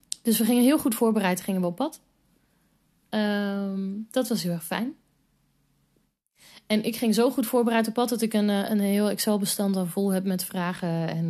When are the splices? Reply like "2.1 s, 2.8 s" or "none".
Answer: none